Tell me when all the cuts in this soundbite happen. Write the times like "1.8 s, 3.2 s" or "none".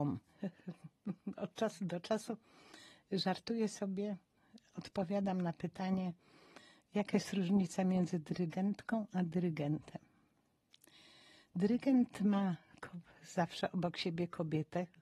none